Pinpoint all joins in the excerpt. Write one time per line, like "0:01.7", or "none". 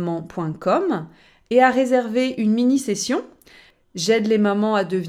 none